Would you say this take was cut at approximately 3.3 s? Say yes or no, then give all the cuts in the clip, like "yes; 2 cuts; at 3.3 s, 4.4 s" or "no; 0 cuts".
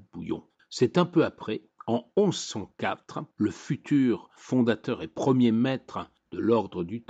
yes; 1 cut; at 3.3 s